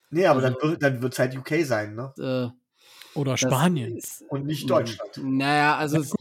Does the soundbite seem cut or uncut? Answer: cut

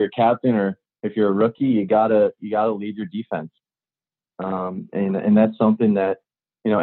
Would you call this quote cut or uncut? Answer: uncut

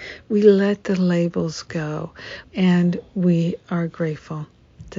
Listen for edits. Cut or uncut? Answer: cut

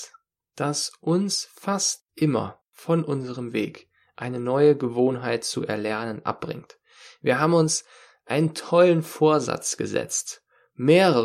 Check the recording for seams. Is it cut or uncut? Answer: uncut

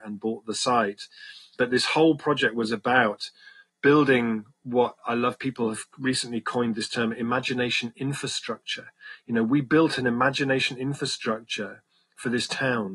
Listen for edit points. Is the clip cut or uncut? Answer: uncut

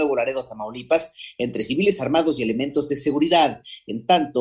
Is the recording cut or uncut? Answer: uncut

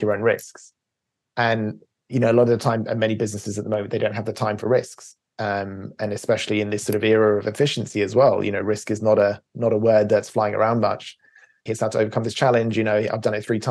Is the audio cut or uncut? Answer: cut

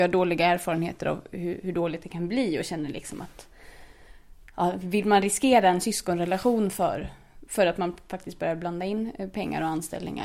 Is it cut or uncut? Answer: uncut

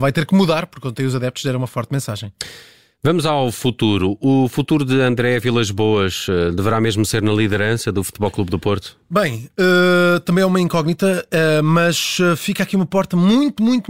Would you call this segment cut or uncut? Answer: uncut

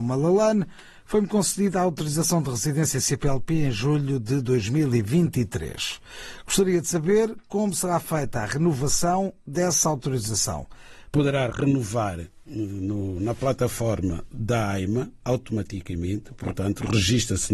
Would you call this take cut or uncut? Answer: cut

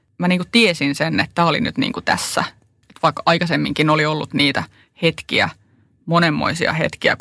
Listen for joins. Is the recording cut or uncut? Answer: cut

